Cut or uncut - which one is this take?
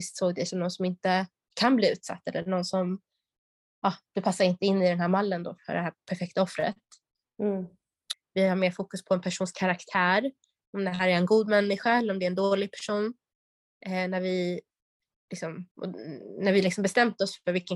cut